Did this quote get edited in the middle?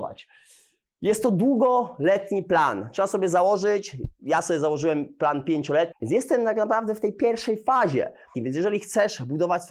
yes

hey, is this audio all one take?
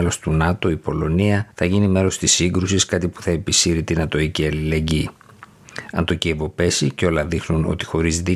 no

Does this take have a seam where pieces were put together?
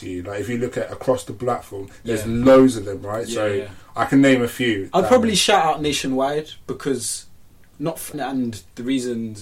yes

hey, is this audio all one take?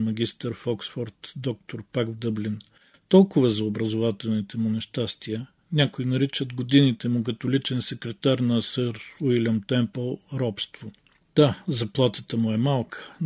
yes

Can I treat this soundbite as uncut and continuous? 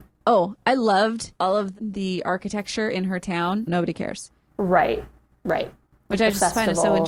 no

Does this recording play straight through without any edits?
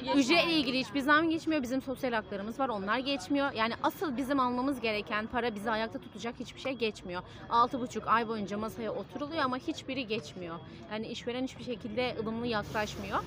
yes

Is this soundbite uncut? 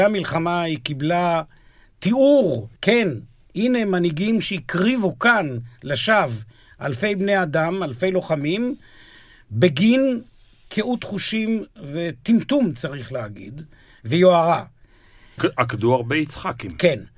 no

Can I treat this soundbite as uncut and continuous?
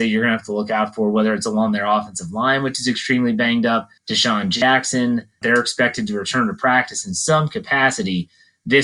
no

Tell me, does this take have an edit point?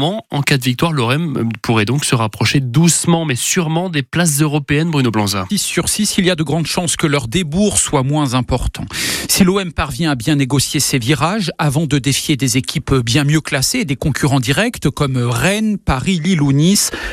yes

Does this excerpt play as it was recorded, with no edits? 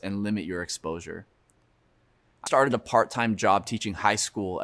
no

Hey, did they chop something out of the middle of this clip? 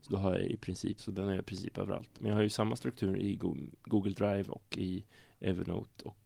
yes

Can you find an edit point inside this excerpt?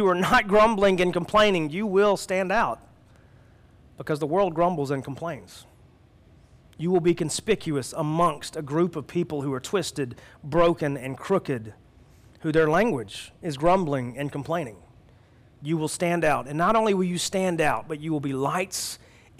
no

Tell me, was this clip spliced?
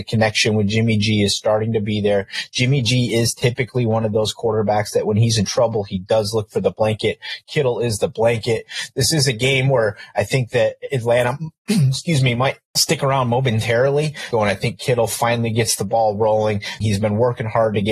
yes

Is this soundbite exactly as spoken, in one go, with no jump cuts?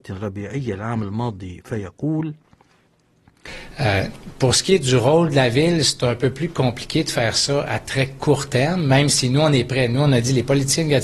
yes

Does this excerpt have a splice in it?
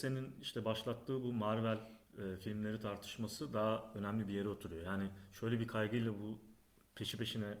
yes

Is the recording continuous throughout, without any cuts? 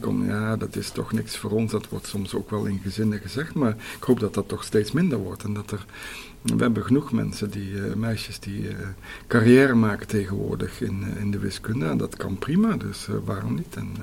yes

